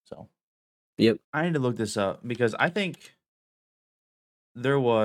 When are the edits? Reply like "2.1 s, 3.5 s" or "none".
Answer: 1.2 s